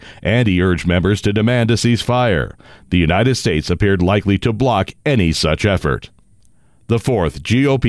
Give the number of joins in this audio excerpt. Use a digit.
0